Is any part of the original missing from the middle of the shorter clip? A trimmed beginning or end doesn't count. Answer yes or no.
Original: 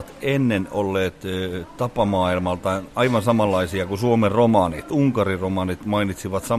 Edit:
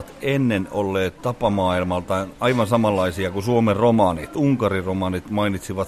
yes